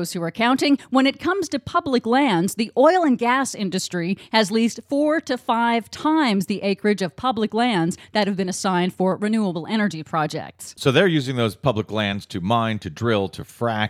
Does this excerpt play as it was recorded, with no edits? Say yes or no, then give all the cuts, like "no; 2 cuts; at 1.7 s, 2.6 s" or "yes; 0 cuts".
yes; 0 cuts